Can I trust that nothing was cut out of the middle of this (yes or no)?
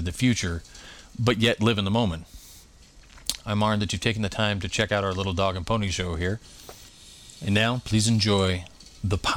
no